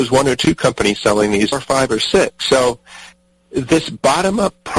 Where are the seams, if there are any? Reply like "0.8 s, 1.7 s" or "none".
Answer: 1.5 s